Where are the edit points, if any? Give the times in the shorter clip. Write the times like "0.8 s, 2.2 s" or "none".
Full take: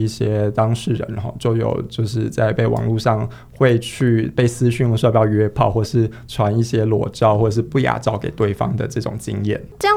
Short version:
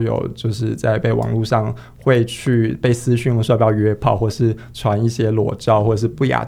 none